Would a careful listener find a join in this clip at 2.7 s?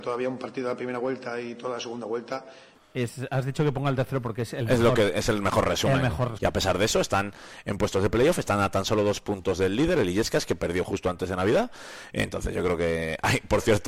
yes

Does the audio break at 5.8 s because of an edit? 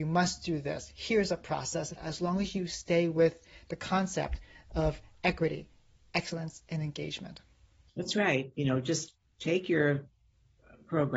no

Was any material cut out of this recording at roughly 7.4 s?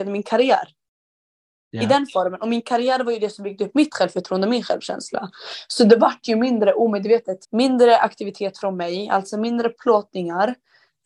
yes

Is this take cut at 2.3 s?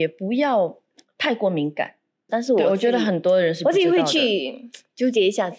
yes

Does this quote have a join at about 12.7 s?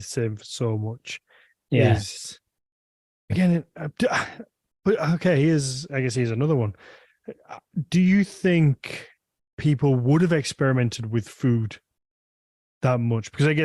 no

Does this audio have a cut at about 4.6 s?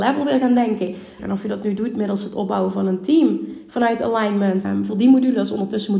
yes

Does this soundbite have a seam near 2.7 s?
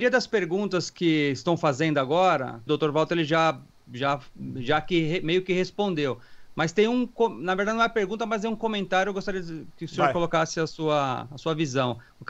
yes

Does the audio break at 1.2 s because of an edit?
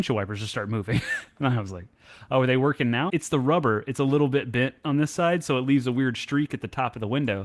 no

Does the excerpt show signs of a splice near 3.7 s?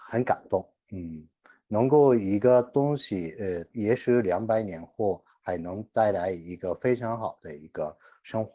yes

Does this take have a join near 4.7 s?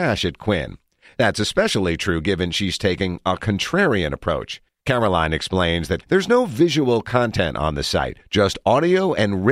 yes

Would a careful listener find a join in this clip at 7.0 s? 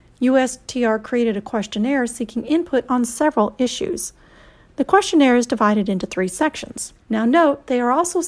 yes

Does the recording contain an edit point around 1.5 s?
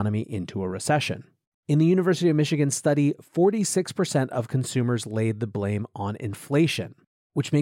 yes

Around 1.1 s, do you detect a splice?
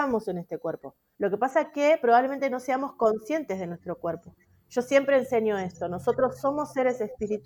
yes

